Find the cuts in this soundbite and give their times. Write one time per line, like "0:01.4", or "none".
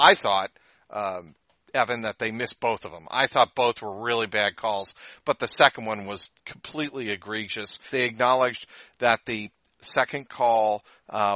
0:06.4
0:07.9